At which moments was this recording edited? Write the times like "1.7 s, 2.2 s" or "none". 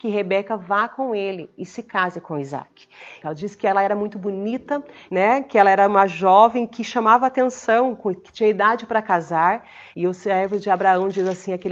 3.2 s, 5.1 s, 9.9 s